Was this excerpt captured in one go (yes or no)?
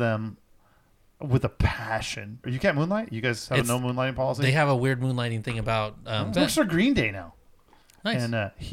no